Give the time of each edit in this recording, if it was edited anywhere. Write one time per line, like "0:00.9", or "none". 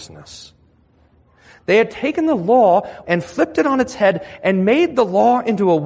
0:03.0